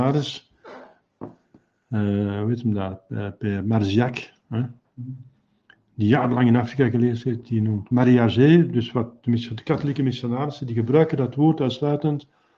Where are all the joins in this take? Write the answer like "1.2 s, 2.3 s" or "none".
none